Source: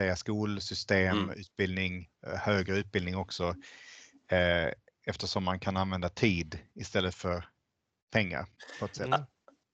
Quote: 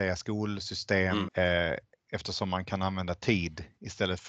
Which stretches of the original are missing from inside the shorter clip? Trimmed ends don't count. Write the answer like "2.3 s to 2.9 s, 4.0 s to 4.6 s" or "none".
1.3 s to 4.2 s